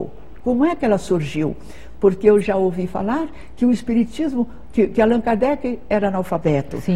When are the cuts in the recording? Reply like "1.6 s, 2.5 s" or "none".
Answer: none